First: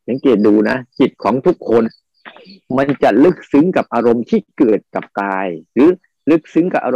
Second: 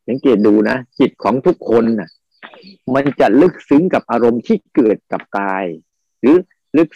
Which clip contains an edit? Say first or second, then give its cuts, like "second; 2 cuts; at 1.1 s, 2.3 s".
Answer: first; 2 cuts; at 1.8 s, 5.7 s